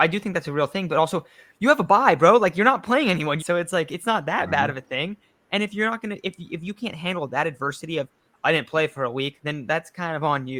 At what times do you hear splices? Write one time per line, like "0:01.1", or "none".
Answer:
0:03.4